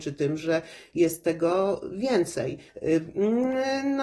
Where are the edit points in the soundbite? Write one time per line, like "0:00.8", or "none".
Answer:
0:02.7

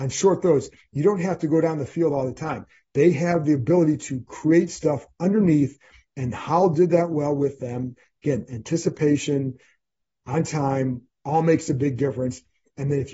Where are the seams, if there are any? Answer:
none

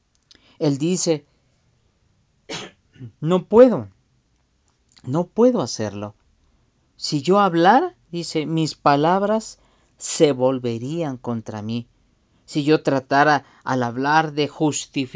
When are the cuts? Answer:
0:03.1

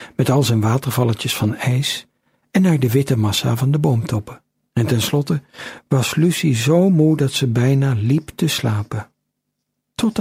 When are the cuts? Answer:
0:04.7

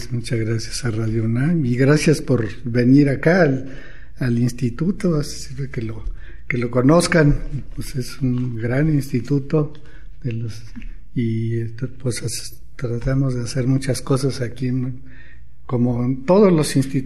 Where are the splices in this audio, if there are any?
none

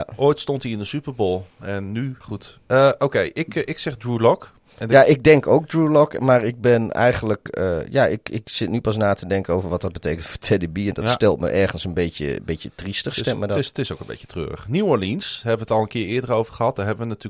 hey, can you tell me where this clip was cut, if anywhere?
0:02.2

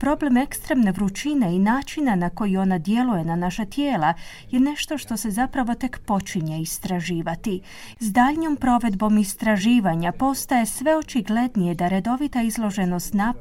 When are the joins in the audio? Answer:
0:07.9

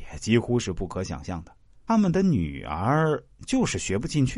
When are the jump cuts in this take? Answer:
0:01.9

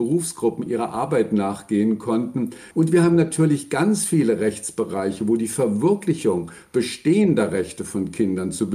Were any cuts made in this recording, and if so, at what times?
0:02.7

